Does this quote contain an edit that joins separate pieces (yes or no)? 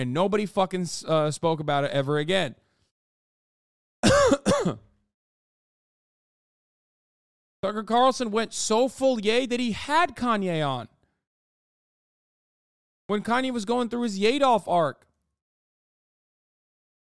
no